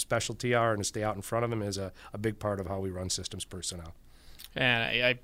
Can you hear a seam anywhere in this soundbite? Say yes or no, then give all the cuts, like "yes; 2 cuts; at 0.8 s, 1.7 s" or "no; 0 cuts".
no; 0 cuts